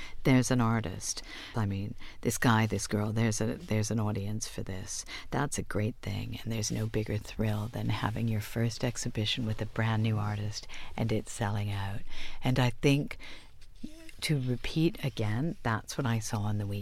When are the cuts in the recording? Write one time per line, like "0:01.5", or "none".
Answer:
0:01.5